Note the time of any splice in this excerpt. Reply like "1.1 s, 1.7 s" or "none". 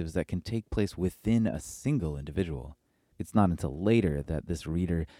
3.1 s